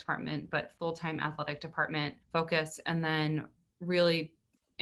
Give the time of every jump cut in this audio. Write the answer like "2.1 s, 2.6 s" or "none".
2.2 s